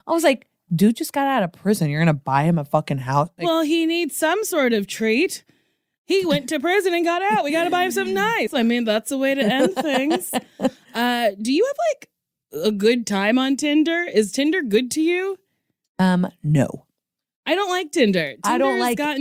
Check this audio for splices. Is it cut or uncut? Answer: cut